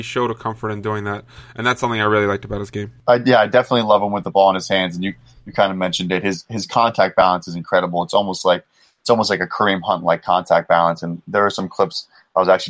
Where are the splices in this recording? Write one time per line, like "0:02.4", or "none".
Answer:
none